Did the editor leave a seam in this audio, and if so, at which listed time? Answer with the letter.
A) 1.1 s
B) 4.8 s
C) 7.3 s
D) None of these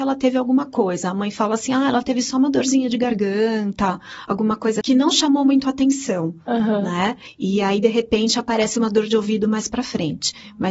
B